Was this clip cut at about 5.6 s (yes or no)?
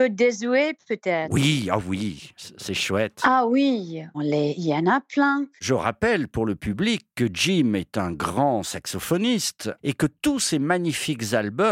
yes